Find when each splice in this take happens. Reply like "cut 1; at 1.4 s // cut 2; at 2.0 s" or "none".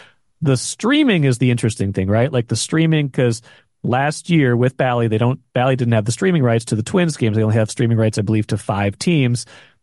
none